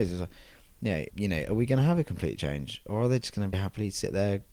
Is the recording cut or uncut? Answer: cut